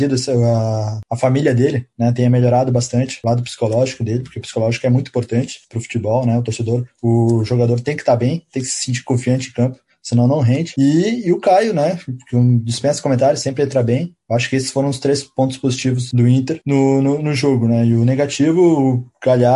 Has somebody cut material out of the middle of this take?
no; 0 cuts

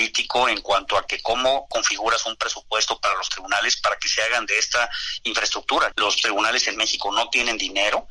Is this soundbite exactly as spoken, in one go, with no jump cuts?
no; 1 cut; at 5.9 s

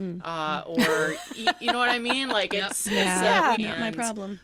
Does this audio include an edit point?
yes; 1 cut; at 3.5 s

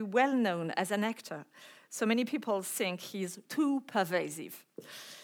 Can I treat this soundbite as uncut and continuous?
no; 1 cut; at 3.5 s

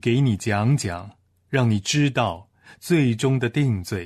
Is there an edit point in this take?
no; 0 cuts

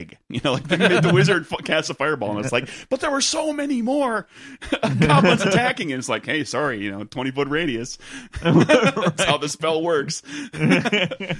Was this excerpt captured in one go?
yes; 0 cuts

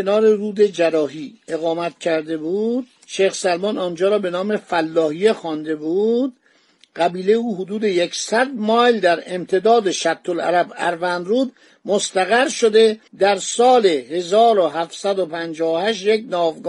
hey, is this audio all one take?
no; 1 cut; at 13.1 s

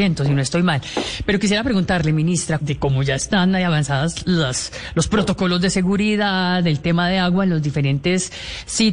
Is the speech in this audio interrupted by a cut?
yes; 1 cut; at 2.6 s

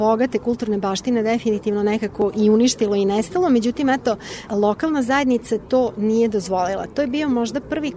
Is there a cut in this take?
no; 0 cuts

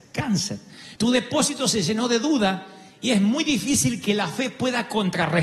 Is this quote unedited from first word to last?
no; 1 cut; at 1.0 s

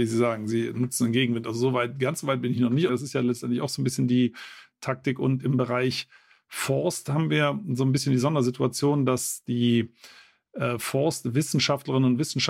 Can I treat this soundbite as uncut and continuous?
no; 1 cut; at 2.9 s

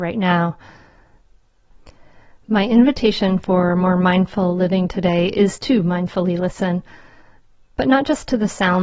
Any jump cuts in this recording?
no; 0 cuts

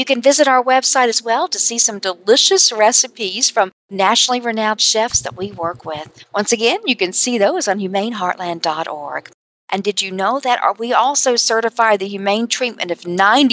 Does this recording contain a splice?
yes; 1 cut; at 9.5 s

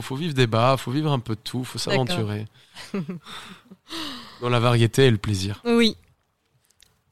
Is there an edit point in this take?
no; 0 cuts

